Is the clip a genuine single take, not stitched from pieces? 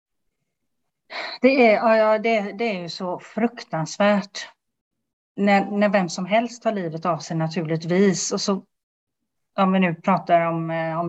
yes; 0 cuts

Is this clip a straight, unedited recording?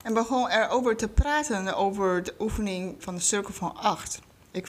no; 1 cut; at 3.0 s

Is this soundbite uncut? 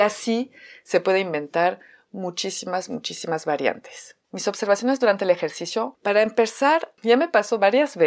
no; 1 cut; at 4.2 s

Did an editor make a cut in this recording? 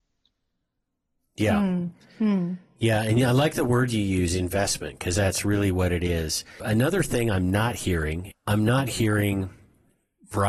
yes; 2 cuts; at 6.6 s, 8.3 s

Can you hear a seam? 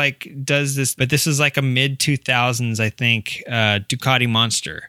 yes; 1 cut; at 1.0 s

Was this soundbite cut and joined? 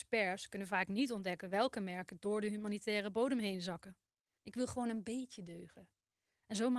yes; 1 cut; at 4.4 s

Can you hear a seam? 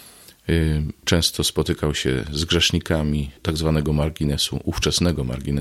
yes; 2 cuts; at 1.0 s, 3.4 s

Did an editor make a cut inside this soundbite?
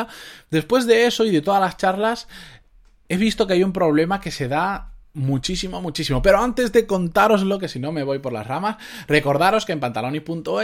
no; 0 cuts

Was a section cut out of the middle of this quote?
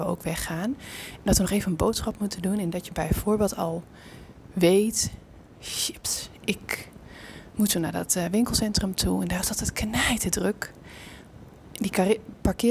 no; 0 cuts

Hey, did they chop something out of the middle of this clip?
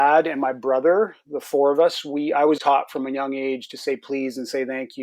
yes; 1 cut; at 2.6 s

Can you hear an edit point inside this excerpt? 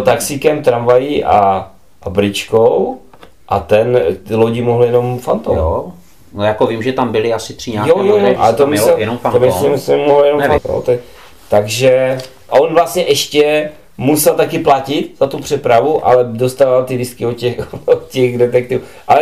yes; 2 cuts; at 8.4 s, 10.6 s

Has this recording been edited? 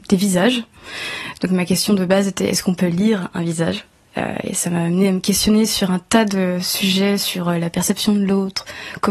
no; 0 cuts

